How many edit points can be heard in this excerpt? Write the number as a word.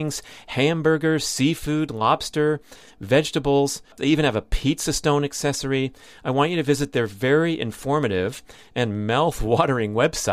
one